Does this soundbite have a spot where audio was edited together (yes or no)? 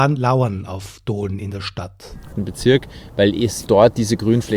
yes